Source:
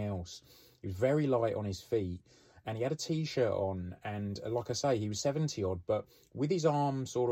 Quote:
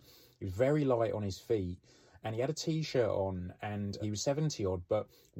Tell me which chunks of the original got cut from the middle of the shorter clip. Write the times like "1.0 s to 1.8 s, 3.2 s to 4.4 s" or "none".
4.4 s to 5.0 s